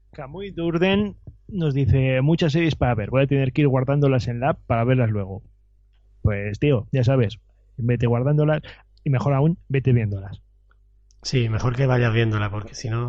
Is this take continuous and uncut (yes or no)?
yes